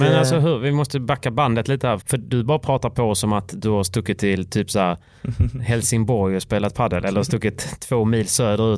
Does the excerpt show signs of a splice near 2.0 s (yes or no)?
yes